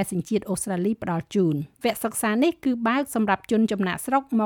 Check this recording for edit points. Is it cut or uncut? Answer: cut